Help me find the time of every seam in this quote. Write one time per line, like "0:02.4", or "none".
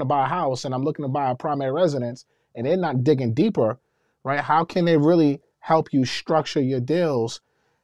none